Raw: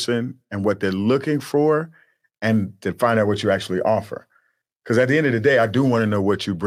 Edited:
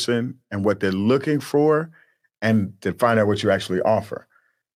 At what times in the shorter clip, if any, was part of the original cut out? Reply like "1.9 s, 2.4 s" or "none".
none

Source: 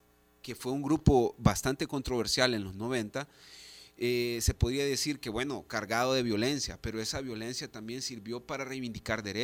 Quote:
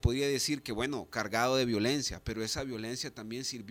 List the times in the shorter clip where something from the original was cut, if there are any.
none

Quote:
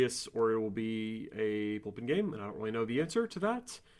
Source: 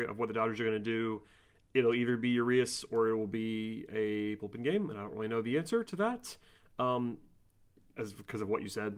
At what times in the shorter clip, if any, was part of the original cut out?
none

